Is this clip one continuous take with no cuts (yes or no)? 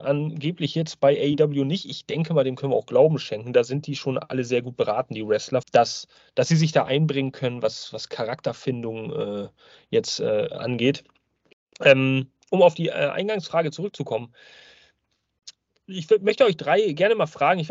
no